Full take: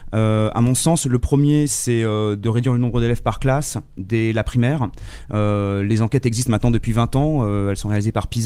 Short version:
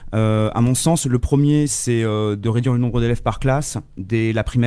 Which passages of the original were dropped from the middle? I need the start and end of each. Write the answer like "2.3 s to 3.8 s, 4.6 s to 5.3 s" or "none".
none

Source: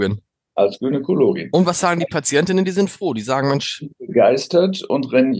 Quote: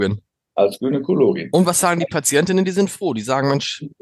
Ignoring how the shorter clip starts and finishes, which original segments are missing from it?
none

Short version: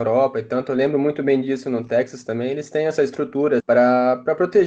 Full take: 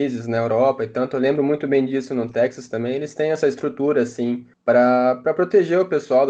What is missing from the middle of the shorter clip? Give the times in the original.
4.0 s to 4.6 s

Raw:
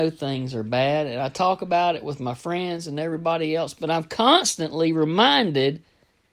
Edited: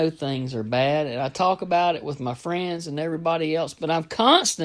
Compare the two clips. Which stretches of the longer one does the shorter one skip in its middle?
none

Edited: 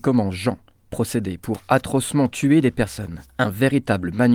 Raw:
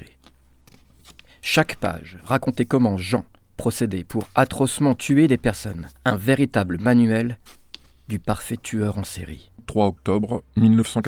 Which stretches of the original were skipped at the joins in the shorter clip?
none

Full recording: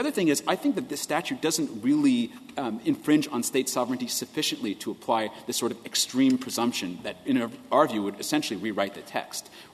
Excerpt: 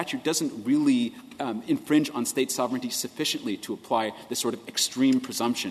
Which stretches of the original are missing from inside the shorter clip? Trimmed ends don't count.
none

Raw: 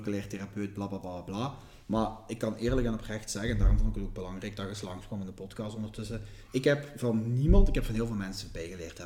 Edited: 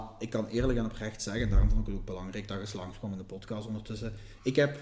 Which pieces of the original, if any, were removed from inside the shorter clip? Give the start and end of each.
none

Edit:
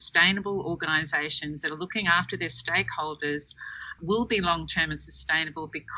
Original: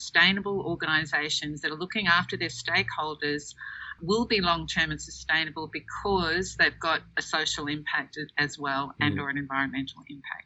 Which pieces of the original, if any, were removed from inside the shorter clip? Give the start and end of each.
none

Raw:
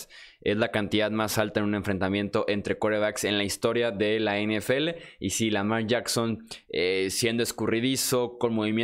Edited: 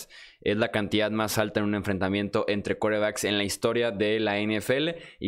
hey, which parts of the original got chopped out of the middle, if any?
none

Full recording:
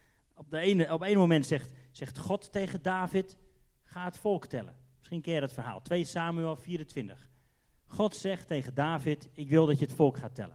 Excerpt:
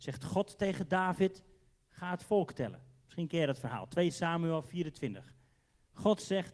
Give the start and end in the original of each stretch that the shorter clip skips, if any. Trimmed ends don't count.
none

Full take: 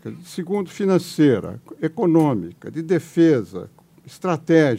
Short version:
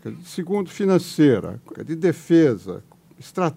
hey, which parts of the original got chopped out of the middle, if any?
1.7 s to 2.6 s

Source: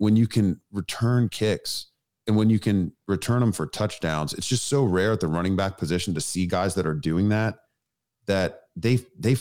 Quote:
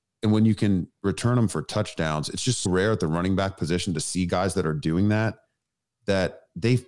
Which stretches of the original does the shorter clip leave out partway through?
4.7 s to 4.9 s

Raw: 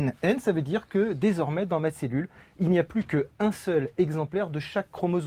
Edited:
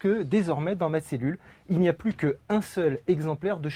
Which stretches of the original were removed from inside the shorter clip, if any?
none

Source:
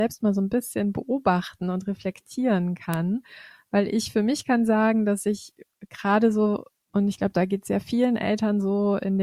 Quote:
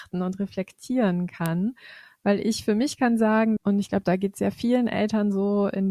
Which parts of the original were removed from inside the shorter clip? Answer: 5.0 s to 6.9 s

